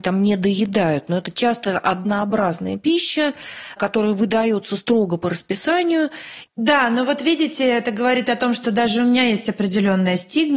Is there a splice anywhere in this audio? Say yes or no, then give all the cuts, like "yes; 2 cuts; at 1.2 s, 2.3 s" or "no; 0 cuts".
yes; 1 cut; at 6.5 s